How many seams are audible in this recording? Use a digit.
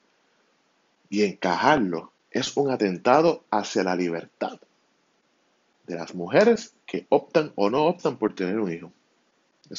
2